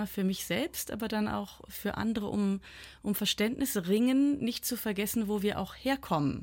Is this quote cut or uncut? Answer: uncut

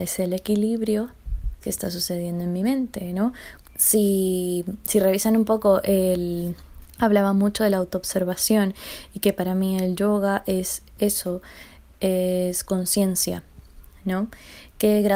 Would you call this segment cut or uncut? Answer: cut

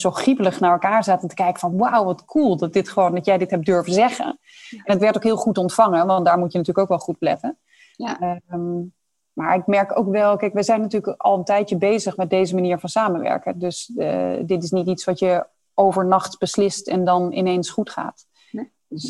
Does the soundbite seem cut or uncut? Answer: uncut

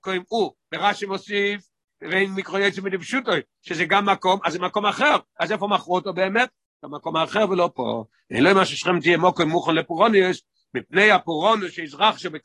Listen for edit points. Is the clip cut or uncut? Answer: uncut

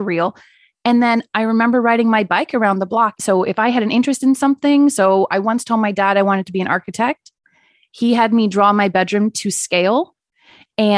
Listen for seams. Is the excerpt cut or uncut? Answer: cut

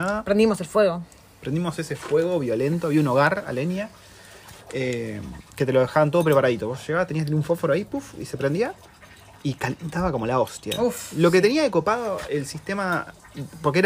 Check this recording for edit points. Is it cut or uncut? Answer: uncut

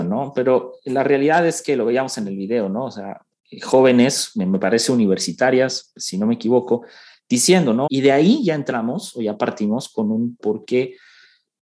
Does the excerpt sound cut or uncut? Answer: cut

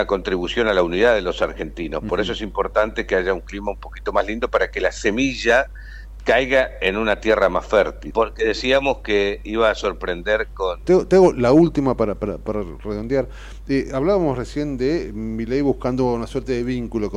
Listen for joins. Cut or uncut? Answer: cut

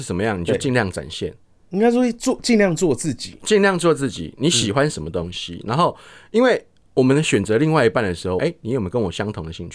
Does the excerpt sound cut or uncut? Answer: cut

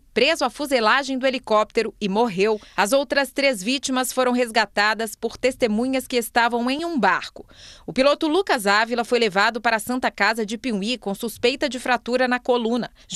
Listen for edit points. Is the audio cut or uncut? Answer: uncut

